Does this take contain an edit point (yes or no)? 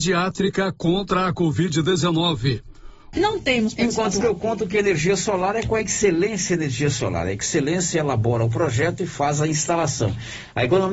yes